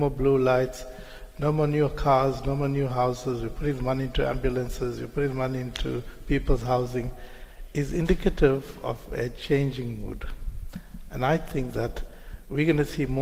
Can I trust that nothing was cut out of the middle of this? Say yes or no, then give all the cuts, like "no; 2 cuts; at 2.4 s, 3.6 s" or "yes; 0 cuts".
yes; 0 cuts